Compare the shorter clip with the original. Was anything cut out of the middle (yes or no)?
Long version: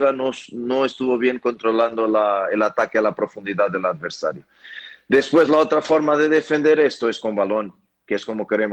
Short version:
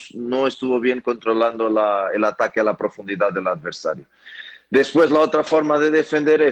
no